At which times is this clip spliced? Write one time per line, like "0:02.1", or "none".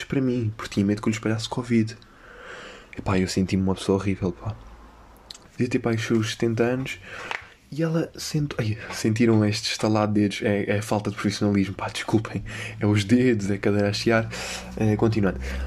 0:05.5